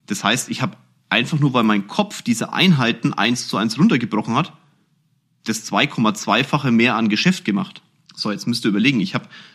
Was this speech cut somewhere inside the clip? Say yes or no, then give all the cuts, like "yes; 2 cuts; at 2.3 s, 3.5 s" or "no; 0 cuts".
yes; 1 cut; at 8.1 s